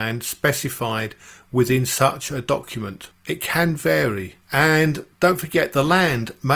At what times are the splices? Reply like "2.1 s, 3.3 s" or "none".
3.1 s